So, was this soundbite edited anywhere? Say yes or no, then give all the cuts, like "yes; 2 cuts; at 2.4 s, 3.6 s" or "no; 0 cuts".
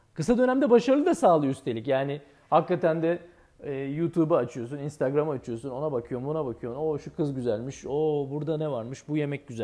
no; 0 cuts